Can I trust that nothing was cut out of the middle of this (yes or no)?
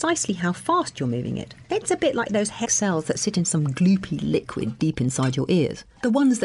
no